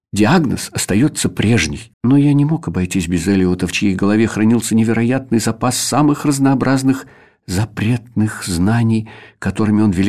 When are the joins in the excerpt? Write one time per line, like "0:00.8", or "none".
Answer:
0:01.9